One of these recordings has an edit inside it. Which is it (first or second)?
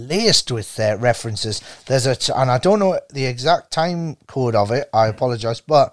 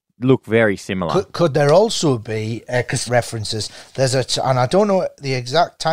second